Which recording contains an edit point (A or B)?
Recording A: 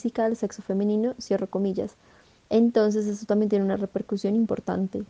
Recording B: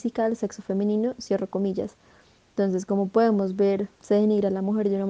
A